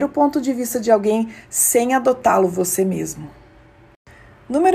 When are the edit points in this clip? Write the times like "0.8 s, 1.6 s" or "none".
none